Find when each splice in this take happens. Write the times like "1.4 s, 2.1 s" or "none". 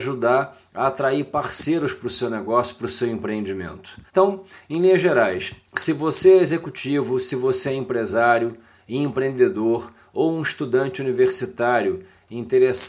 4.1 s

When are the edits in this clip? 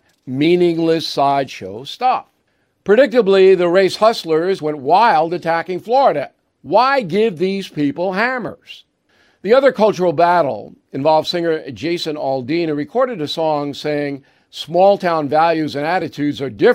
4.6 s

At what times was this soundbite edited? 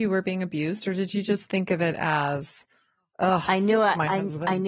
none

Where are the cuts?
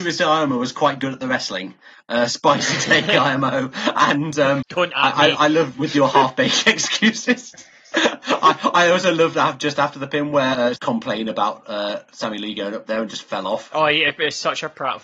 4.6 s, 10.8 s

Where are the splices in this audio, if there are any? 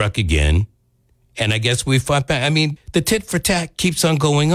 2.8 s

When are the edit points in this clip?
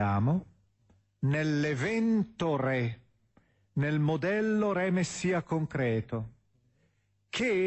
none

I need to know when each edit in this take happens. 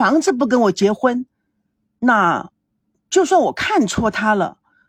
none

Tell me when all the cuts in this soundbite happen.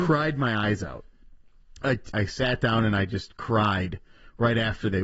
2.1 s

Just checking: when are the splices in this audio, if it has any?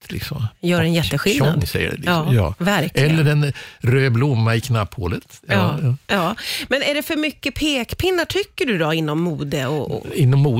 none

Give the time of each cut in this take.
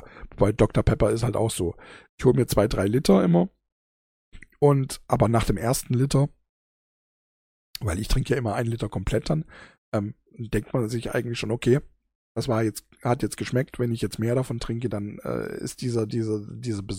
none

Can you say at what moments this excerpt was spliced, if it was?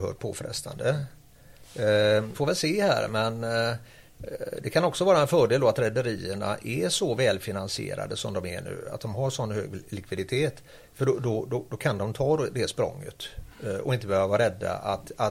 2.3 s

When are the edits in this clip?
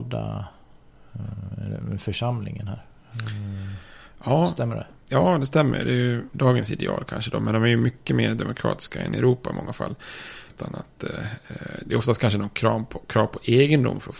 6.3 s, 10.5 s

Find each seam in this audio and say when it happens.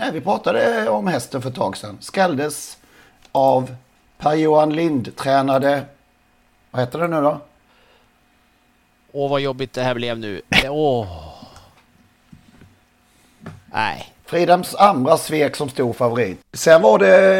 10.6 s, 16.4 s

